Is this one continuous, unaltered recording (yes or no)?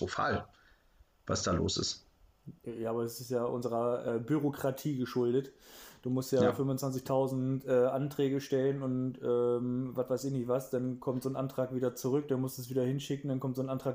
yes